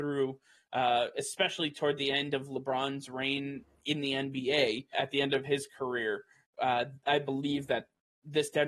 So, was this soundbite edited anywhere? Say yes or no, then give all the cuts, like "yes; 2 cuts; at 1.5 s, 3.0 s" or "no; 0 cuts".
yes; 1 cut; at 4.9 s